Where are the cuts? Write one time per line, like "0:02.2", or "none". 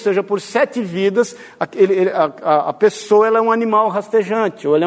none